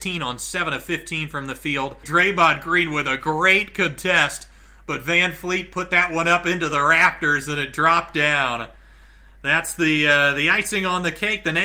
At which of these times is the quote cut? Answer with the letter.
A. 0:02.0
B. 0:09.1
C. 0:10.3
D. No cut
A